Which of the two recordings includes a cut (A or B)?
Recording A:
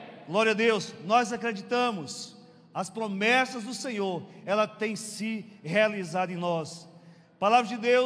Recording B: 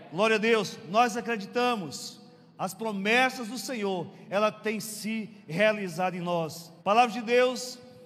B